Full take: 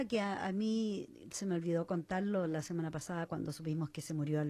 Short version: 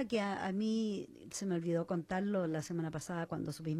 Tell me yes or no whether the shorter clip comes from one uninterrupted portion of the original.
yes